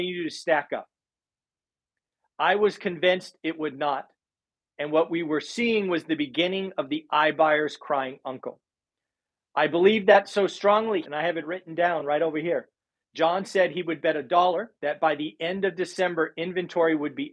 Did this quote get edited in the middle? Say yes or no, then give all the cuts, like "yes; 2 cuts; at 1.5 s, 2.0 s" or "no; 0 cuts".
yes; 3 cuts; at 11.0 s, 13.0 s, 14.7 s